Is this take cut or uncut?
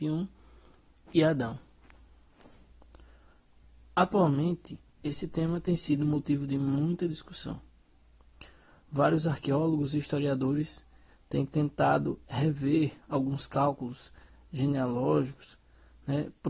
uncut